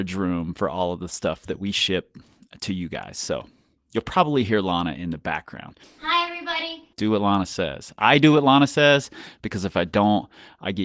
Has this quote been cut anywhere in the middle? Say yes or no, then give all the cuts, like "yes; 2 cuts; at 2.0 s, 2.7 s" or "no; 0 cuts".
yes; 2 cuts; at 5.8 s, 6.9 s